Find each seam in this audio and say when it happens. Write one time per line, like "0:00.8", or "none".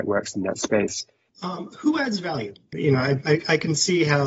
0:01.3
0:02.7